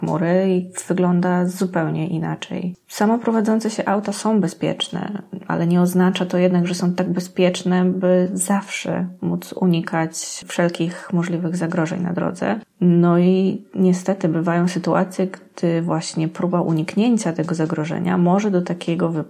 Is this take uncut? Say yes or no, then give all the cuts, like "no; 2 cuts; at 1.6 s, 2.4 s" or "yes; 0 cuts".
yes; 0 cuts